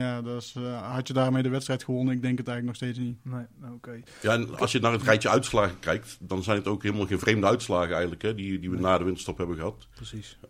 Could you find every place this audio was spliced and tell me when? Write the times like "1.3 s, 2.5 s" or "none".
none